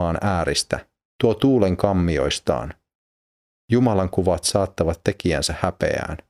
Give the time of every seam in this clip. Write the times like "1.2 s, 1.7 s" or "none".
1.1 s, 3.5 s